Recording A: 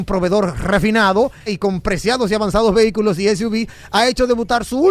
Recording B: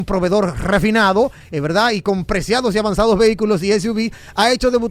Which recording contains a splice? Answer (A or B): A